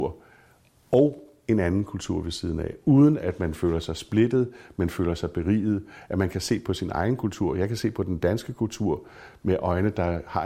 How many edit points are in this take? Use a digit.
0